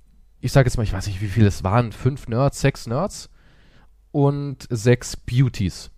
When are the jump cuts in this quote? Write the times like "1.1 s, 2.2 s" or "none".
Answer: none

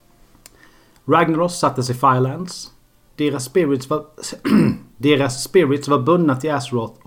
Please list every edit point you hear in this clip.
3.1 s

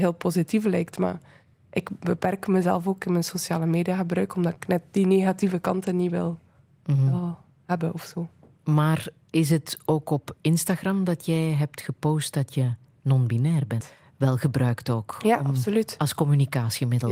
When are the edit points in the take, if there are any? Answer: 13.8 s

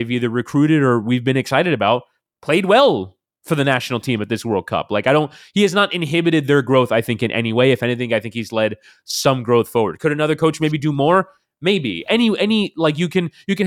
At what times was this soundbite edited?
none

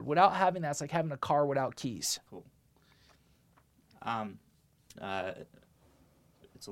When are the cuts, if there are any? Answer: 2.3 s, 5.0 s

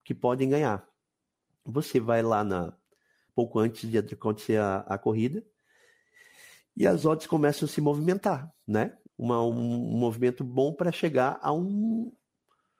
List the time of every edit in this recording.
3.3 s, 9.1 s

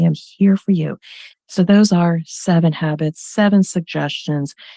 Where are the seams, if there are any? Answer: 1.3 s

